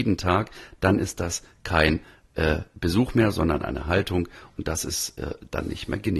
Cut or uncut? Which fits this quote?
uncut